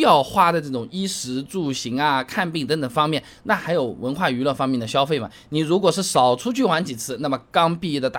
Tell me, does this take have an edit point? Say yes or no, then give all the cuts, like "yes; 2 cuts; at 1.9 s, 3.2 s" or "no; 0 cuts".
no; 0 cuts